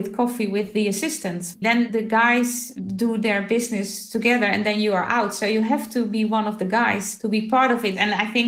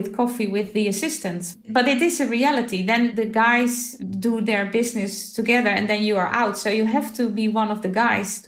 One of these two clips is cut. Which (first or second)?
first